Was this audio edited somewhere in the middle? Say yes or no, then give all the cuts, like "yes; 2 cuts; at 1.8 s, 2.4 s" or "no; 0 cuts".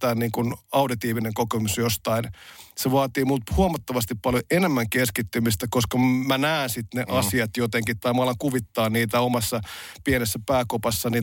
no; 0 cuts